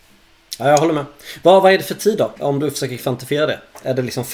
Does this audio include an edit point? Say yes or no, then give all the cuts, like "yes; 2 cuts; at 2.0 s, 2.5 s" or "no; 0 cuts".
yes; 1 cut; at 2.4 s